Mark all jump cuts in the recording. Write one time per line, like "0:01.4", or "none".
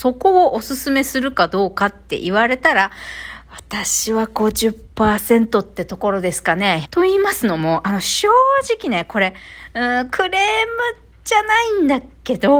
0:06.8

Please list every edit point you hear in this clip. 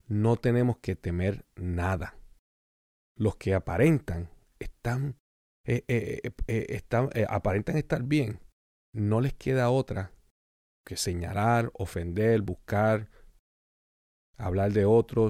none

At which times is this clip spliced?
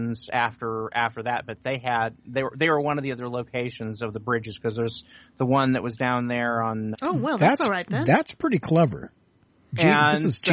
0:06.9

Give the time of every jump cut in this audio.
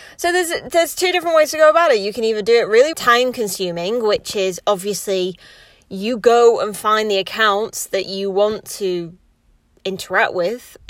0:02.9

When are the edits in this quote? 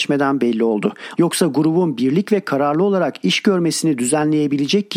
0:01.2

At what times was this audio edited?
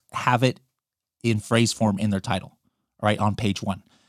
none

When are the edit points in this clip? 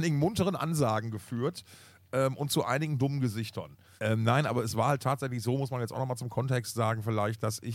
0:04.0

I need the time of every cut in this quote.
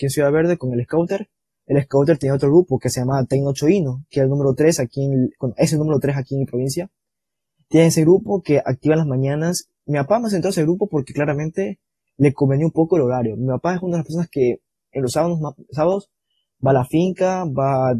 none

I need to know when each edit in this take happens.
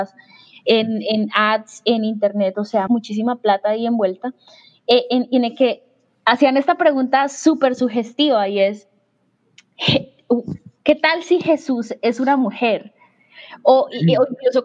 0:02.9

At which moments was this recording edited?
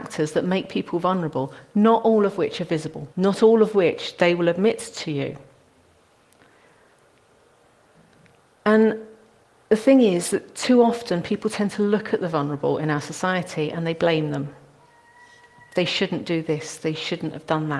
0:03.1

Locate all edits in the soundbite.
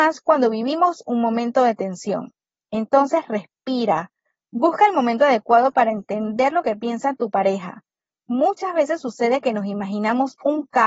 none

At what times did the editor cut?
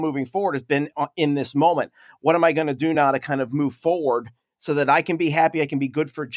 none

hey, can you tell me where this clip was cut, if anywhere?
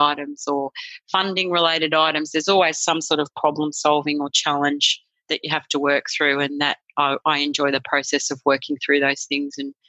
0:05.3

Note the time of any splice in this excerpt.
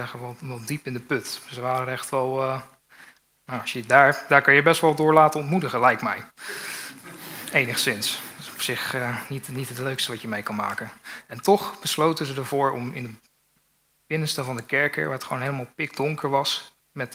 none

